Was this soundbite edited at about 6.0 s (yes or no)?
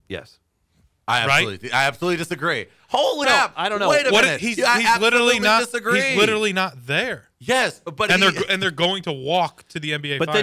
no